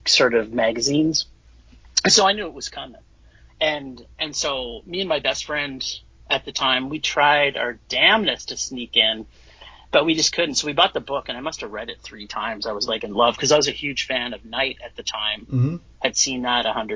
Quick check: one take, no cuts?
yes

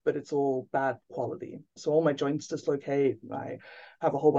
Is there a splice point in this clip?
no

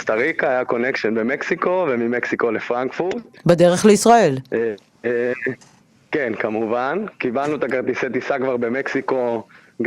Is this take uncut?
yes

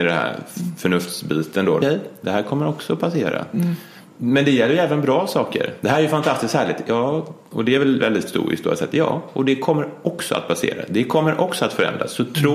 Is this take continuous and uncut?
no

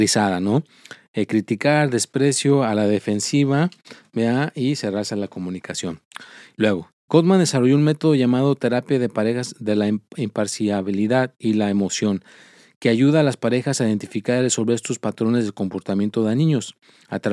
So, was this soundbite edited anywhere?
yes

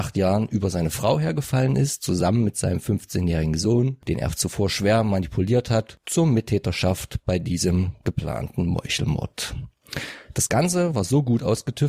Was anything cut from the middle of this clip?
no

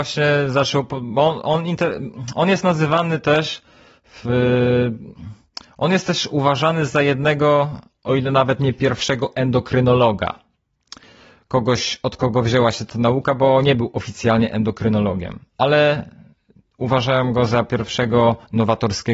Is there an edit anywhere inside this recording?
no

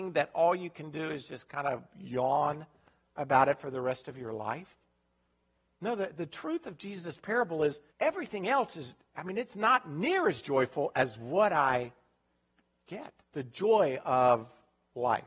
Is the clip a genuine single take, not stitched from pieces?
no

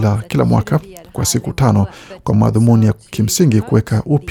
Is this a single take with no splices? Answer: yes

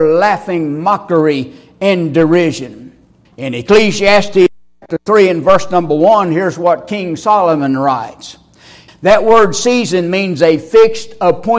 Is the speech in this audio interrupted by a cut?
yes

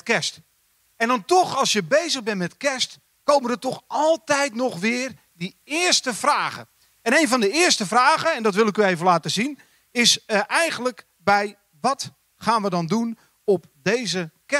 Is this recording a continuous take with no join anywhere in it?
yes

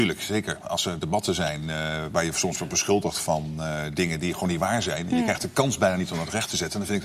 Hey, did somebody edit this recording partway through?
no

